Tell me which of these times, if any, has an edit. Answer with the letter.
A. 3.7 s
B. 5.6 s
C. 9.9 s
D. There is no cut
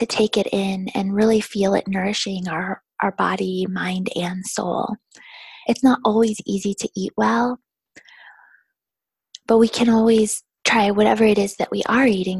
B